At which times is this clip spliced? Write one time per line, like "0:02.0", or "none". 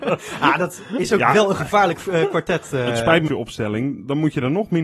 0:03.2